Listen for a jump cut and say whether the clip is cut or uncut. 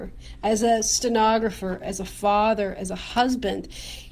cut